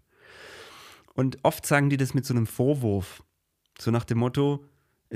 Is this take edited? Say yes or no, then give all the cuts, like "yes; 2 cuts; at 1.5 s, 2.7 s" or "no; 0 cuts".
no; 0 cuts